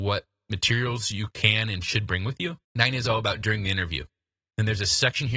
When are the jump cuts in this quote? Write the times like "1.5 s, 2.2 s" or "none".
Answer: 2.6 s